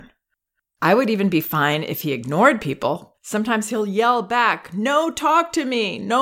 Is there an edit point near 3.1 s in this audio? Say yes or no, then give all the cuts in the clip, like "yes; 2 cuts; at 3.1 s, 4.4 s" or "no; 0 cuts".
yes; 1 cut; at 3.1 s